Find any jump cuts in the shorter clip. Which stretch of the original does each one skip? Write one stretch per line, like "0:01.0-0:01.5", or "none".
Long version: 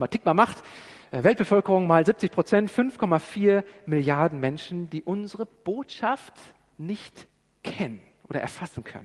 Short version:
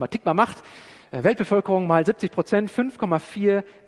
none